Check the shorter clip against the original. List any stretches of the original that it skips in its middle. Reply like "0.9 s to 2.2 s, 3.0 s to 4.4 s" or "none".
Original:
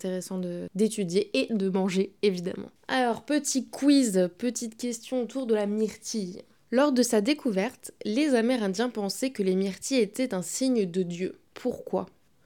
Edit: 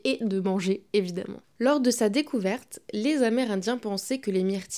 2.7 s to 6.6 s